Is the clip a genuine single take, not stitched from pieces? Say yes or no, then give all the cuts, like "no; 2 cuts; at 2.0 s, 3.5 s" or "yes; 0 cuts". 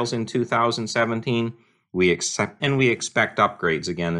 no; 1 cut; at 2.6 s